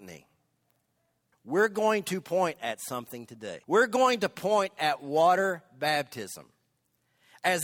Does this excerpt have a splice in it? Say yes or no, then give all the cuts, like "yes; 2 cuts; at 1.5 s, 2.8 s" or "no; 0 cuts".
yes; 2 cuts; at 1.3 s, 3.6 s